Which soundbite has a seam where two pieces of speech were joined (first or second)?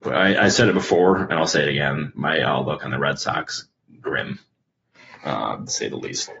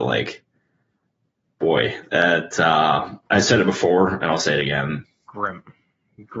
second